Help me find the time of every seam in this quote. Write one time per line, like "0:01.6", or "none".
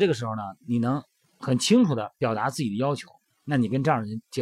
none